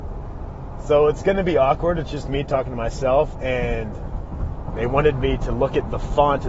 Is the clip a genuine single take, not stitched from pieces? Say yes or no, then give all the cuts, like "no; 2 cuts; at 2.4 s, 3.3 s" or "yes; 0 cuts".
no; 1 cut; at 4.7 s